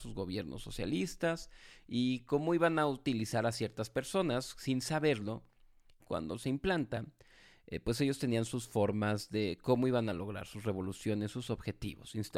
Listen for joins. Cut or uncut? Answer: cut